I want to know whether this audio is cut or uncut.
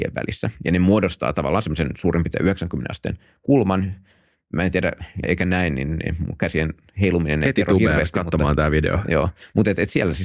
cut